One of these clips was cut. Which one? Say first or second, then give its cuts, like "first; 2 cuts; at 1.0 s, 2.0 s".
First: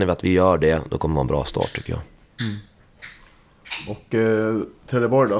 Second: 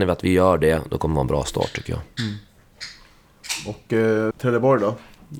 second; 2 cuts; at 2.1 s, 4.3 s